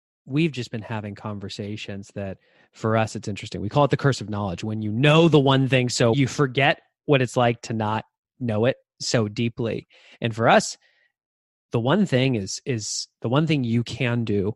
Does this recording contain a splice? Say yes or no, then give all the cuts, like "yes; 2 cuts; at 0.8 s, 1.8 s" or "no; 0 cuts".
yes; 1 cut; at 6.1 s